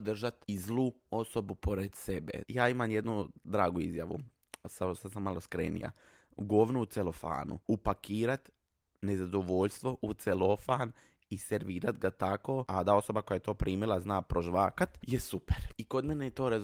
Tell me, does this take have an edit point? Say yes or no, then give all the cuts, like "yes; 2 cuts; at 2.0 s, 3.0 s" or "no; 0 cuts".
yes; 2 cuts; at 2.4 s, 5.0 s